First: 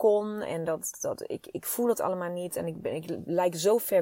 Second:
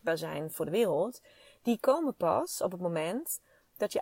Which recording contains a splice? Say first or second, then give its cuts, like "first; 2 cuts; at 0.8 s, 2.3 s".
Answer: first; 1 cut; at 0.9 s